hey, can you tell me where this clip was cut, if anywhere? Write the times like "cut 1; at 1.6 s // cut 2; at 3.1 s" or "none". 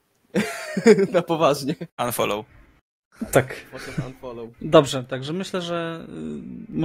cut 1; at 1.9 s // cut 2; at 4.5 s